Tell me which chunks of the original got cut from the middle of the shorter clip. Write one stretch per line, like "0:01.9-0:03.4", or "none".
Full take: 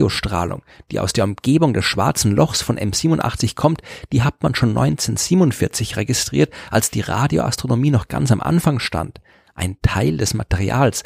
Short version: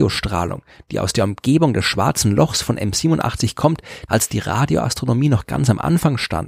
0:04.1-0:06.7